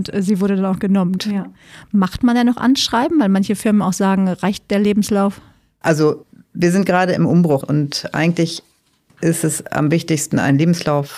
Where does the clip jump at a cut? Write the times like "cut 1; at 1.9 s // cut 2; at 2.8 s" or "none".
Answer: cut 1; at 1.2 s // cut 2; at 7.6 s